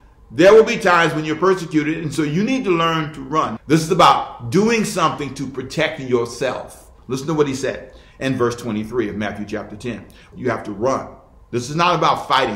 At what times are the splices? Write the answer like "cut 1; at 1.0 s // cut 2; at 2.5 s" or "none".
cut 1; at 3.6 s // cut 2; at 10.3 s